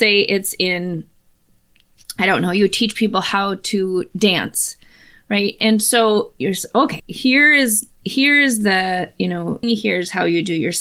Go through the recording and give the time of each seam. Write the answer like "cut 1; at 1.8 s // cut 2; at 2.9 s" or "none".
cut 1; at 7.0 s // cut 2; at 9.6 s